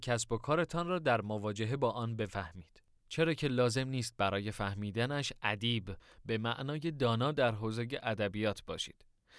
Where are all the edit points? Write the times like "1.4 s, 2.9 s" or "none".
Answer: 3.0 s